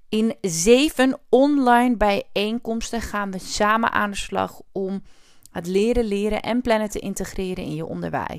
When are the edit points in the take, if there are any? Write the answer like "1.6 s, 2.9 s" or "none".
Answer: none

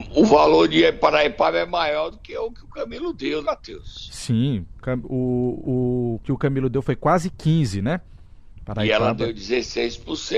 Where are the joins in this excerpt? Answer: 3.4 s

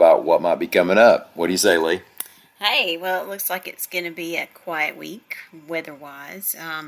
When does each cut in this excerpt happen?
none

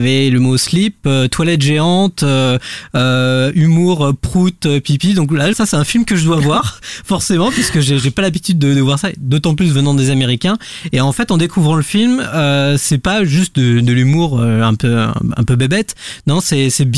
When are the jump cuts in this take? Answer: 5.5 s

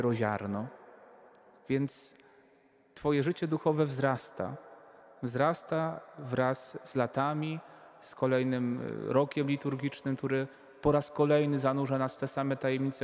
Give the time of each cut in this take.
none

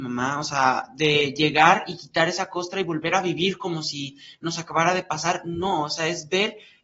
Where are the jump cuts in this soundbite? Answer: none

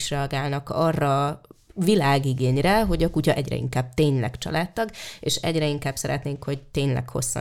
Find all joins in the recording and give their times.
none

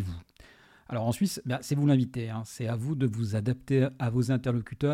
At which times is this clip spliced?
none

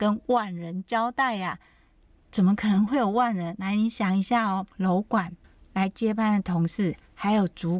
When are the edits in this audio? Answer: 4.7 s

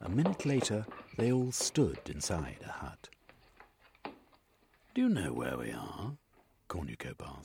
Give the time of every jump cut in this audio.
none

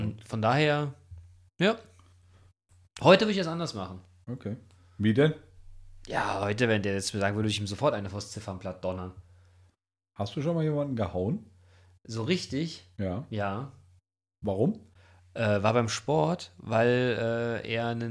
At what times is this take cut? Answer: 14.3 s

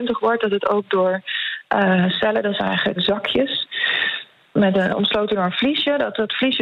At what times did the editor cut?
3.0 s

